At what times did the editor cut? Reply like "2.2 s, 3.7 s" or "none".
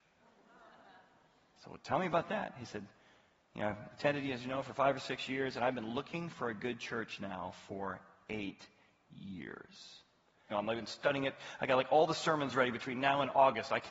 10.5 s